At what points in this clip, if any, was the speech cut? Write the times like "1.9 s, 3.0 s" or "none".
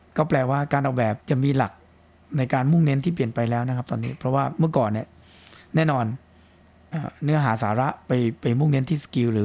1.2 s